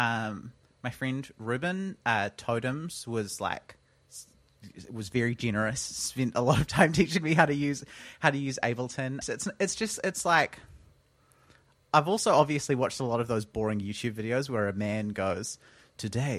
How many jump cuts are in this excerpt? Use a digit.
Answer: 1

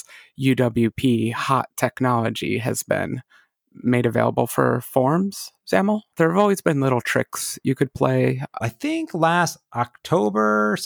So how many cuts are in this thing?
2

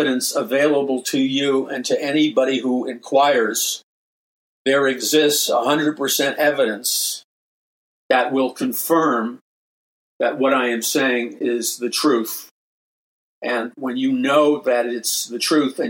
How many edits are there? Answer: 0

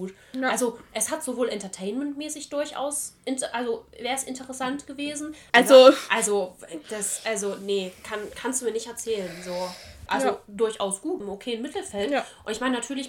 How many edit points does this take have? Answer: 3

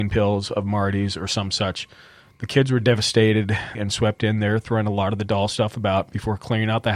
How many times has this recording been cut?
1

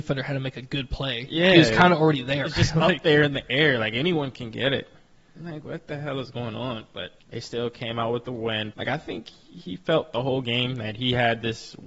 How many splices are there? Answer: 2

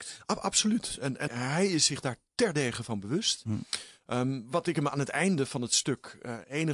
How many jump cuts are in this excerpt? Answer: 1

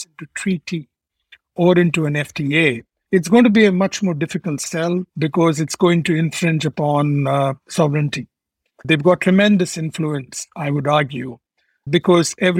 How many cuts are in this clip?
3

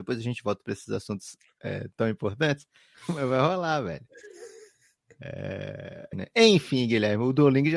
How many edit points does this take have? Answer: 2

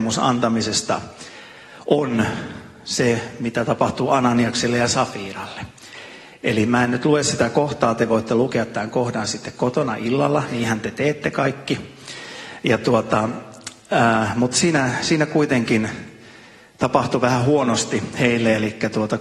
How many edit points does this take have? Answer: 0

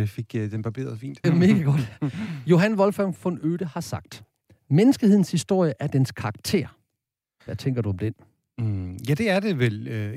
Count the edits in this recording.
1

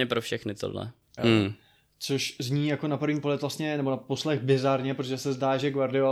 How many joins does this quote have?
1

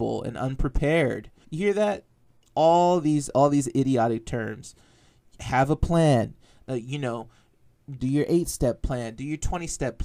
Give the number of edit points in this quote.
2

